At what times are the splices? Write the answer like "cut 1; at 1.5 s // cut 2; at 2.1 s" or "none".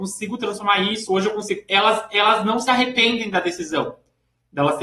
none